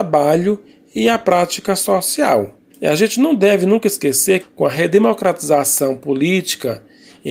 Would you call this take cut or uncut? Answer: cut